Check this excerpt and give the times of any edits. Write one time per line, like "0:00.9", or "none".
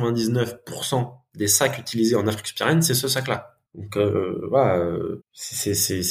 0:03.7
0:05.2